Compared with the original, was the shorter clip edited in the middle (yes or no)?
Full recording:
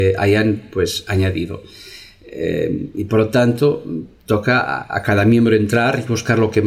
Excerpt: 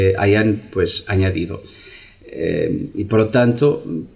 no